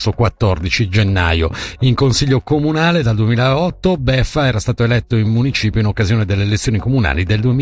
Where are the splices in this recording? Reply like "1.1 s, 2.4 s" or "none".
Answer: none